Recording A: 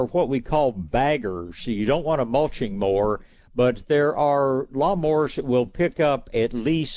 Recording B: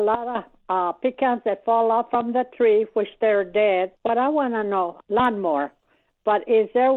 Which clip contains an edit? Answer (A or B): B